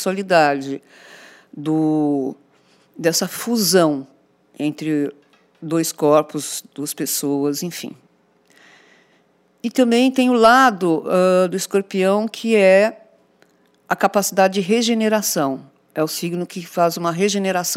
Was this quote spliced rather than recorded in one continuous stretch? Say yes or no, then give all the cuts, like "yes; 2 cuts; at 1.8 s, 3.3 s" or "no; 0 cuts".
no; 0 cuts